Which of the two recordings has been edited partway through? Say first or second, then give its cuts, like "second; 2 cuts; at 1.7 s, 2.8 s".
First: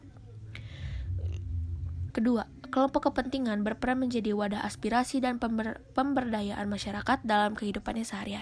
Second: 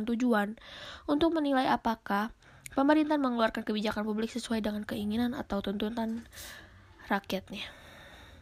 first; 1 cut; at 2.1 s